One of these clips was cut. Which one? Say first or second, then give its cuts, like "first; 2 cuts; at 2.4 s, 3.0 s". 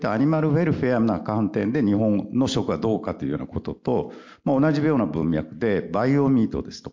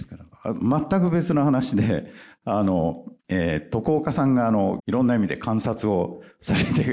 second; 2 cuts; at 3.2 s, 4.8 s